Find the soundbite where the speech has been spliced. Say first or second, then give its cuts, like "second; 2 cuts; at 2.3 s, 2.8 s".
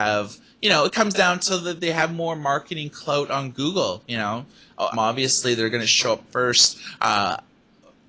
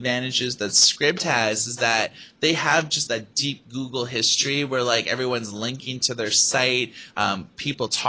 first; 1 cut; at 4.9 s